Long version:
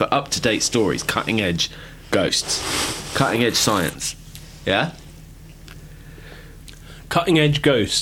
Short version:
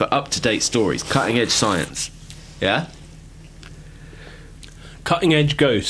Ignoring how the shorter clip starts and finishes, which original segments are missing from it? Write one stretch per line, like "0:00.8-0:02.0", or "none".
0:01.0-0:03.1